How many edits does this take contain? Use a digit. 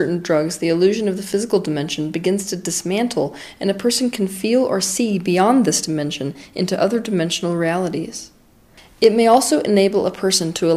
0